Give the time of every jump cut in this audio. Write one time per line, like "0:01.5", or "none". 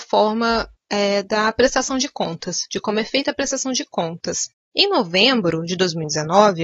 0:04.6